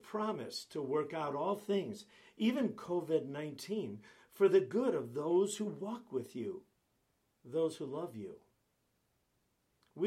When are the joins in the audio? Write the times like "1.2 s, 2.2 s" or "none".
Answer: none